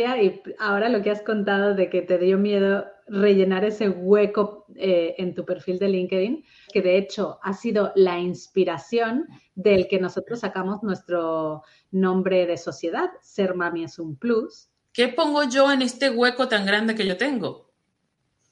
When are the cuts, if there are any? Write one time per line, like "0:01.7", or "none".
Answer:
0:06.7
0:14.8